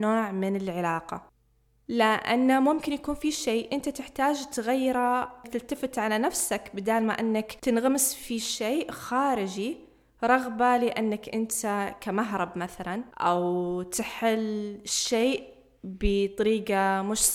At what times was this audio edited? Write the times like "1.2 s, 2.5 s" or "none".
13.1 s